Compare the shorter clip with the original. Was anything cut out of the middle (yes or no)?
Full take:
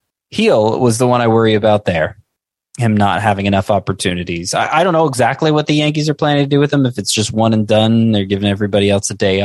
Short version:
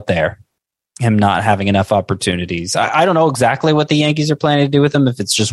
no